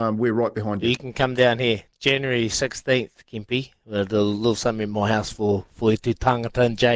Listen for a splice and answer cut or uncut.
uncut